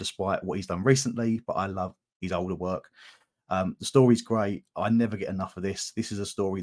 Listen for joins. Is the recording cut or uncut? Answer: uncut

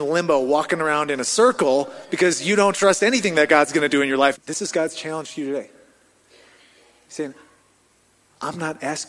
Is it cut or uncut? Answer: cut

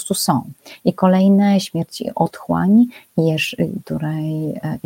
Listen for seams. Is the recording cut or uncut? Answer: cut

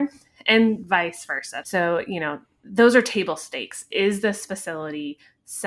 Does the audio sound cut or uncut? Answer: cut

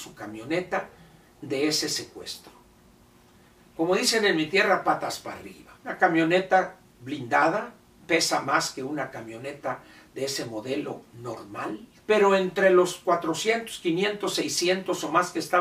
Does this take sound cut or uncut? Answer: cut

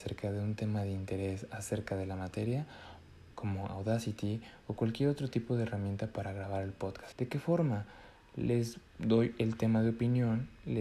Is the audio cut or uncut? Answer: cut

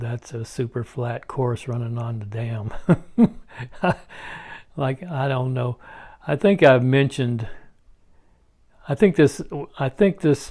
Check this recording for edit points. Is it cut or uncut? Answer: uncut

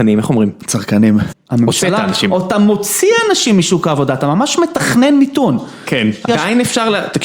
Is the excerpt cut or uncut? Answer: cut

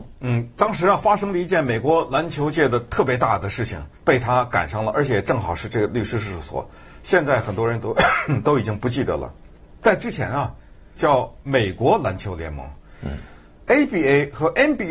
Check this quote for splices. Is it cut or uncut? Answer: cut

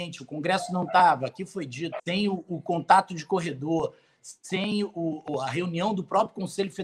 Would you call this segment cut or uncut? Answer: cut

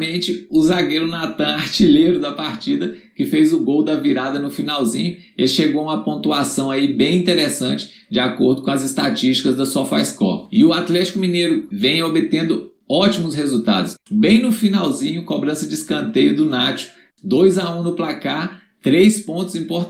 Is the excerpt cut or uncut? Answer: cut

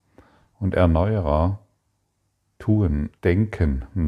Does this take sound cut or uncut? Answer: cut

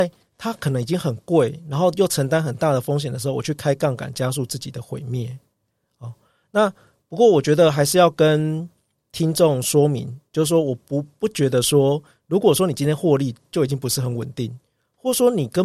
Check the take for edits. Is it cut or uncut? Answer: uncut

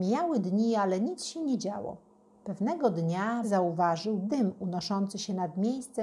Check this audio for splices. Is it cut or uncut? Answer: cut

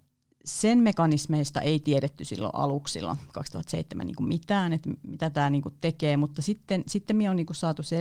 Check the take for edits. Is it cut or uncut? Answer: uncut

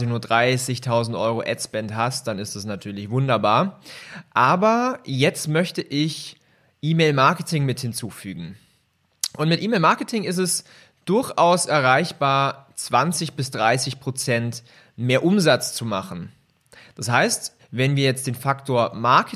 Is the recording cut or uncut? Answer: cut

